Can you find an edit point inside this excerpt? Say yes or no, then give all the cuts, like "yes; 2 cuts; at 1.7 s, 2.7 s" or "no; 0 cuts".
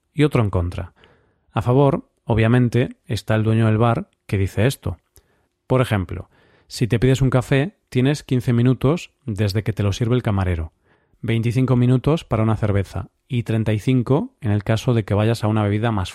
yes; 1 cut; at 5.5 s